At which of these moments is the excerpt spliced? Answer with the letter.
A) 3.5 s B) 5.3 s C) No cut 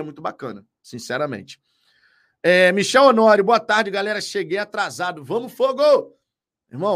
C